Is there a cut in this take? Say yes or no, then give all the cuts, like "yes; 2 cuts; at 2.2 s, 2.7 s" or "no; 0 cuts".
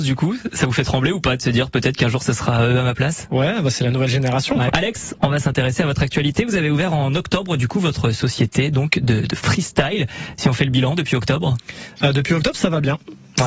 yes; 1 cut; at 4.7 s